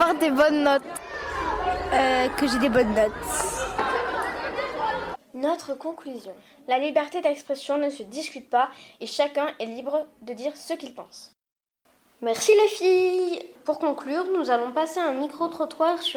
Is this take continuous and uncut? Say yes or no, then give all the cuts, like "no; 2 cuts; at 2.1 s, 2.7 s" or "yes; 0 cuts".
no; 1 cut; at 5.1 s